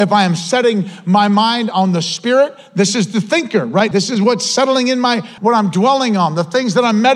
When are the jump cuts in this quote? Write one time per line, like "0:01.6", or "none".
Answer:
0:03.9
0:05.4